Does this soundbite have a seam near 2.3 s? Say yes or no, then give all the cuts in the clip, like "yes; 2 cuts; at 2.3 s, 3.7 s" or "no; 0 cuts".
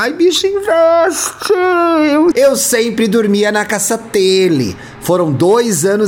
yes; 1 cut; at 2.3 s